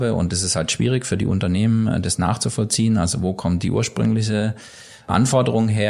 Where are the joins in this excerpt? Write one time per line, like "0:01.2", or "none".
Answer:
none